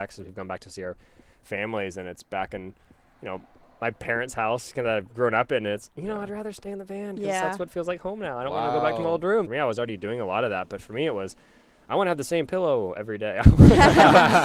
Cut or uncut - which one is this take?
cut